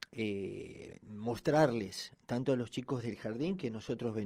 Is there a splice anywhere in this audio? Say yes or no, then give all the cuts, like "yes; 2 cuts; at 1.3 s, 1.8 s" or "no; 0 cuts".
no; 0 cuts